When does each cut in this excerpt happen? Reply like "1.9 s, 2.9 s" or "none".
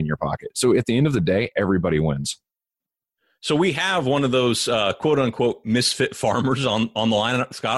none

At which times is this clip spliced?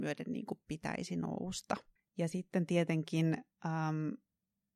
2.0 s, 3.5 s

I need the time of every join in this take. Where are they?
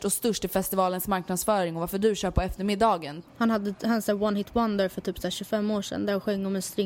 3.3 s

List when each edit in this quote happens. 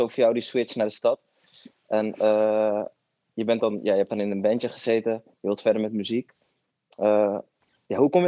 none

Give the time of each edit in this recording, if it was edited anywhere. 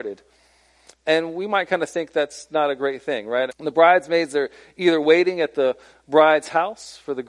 0.9 s, 3.5 s

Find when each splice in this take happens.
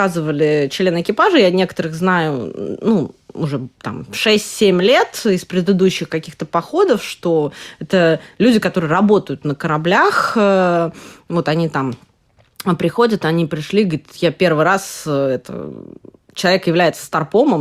none

